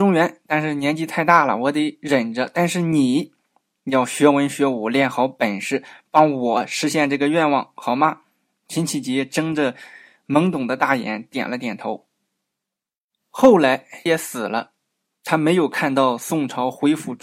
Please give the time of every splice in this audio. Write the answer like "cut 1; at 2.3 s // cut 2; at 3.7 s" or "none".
cut 1; at 14.1 s

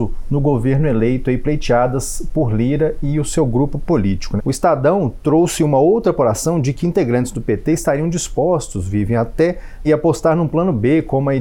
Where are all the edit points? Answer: cut 1; at 4.4 s // cut 2; at 9.8 s

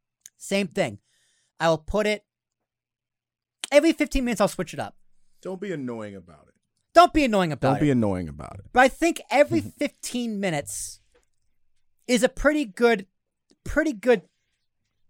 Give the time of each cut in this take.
none

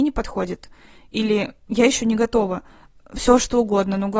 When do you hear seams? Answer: none

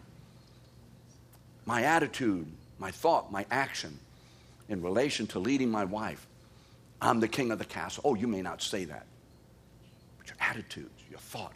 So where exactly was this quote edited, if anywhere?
none

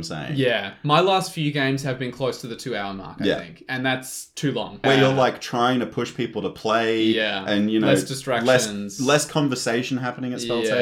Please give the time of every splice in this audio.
cut 1; at 4.8 s

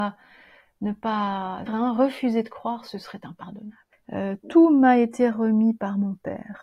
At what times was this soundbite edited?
cut 1; at 1.7 s // cut 2; at 3.9 s

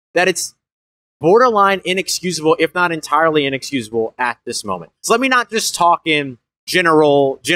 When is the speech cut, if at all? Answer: cut 1; at 5.0 s

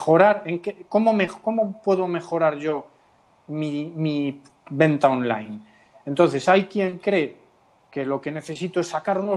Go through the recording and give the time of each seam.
none

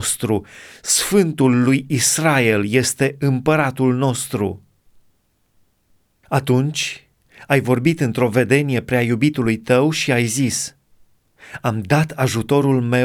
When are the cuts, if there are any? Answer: none

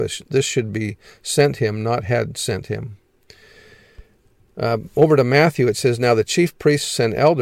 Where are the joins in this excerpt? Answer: none

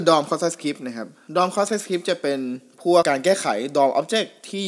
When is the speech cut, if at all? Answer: cut 1; at 3.0 s

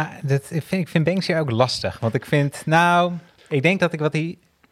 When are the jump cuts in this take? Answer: cut 1; at 3.4 s

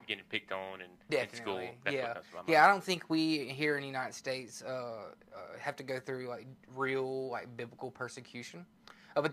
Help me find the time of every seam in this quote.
none

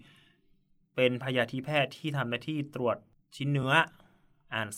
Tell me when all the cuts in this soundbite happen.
none

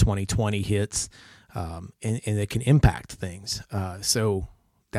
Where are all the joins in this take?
none

